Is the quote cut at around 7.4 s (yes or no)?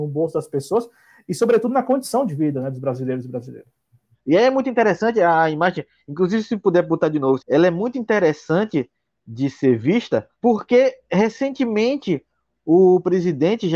yes